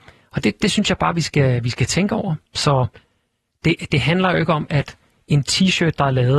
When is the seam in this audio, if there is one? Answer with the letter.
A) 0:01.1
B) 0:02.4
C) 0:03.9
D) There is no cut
B